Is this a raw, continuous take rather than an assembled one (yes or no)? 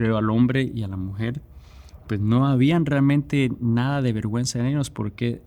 yes